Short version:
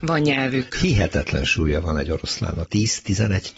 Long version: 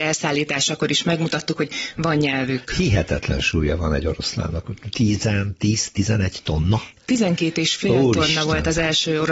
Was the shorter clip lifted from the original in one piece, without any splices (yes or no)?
no